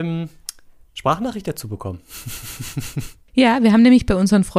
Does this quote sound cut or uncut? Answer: uncut